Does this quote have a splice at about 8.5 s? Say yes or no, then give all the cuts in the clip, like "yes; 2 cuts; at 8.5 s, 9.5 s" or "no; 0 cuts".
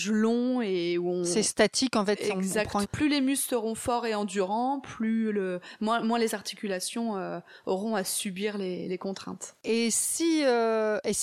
no; 1 cut; at 2.8 s